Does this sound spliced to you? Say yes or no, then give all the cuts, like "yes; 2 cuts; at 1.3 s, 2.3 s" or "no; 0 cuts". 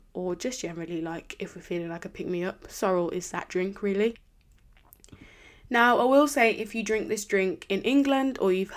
no; 0 cuts